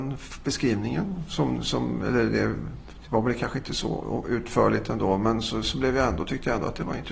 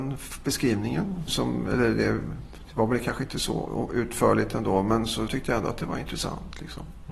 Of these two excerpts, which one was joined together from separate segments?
second; 2 cuts; at 1.3 s, 5.3 s

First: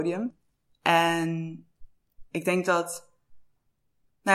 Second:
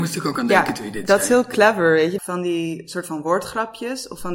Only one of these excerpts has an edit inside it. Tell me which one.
second; 1 cut; at 2.2 s

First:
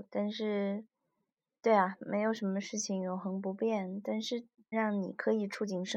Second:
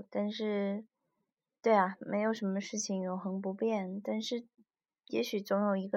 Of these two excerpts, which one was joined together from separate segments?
first; 1 cut; at 4.7 s

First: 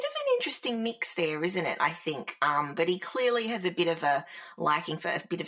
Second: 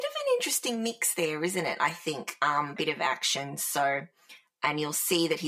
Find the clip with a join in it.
second; 1 cut; at 2.8 s

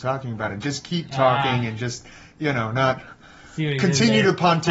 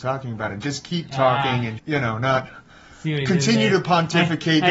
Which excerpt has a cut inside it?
second; 1 cut; at 1.8 s

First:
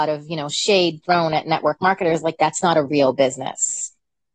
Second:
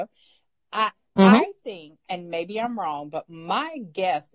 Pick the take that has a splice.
second; 1 cut; at 2.1 s

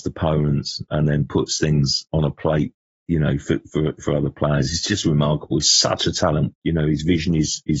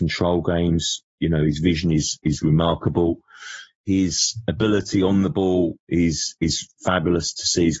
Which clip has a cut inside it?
first; 1 cut; at 6.5 s

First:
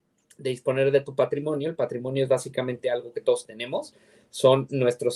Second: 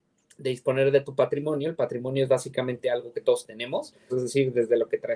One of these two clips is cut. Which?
second; 1 cut; at 4.1 s

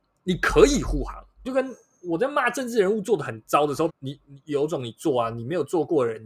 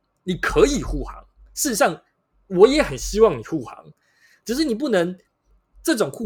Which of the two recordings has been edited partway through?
first; 2 cuts; at 1.5 s, 3.9 s

